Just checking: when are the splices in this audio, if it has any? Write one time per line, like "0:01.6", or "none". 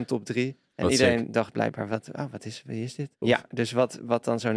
0:03.2